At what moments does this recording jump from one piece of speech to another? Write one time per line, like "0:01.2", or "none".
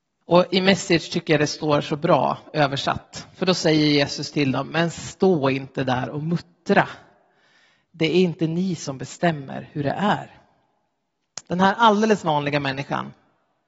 0:11.4